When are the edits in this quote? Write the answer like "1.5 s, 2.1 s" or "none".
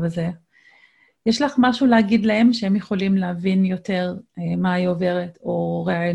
none